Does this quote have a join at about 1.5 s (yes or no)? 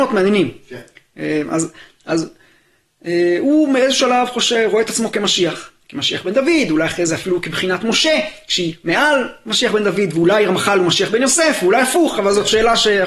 no